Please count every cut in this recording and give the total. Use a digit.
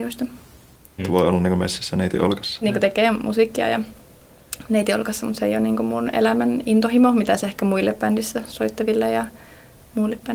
2